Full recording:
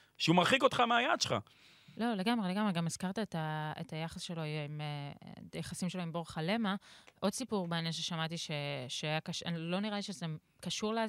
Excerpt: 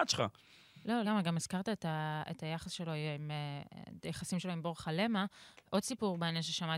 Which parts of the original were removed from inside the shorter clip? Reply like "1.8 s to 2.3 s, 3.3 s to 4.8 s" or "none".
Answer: 2.2 s to 2.5 s